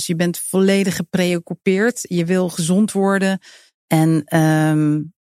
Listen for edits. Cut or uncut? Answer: uncut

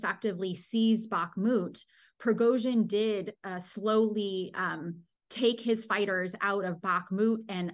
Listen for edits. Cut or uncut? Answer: uncut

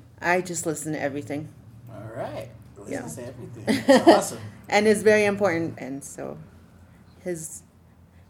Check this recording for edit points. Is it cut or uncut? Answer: cut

